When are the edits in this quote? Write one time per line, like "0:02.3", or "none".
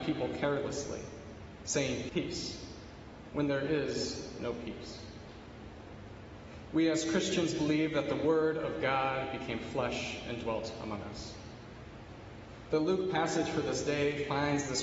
0:02.1
0:06.7